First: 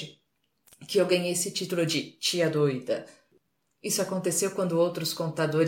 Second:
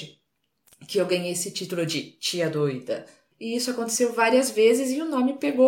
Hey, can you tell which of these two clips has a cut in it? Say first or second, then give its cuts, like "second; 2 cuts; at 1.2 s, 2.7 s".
second; 1 cut; at 3.3 s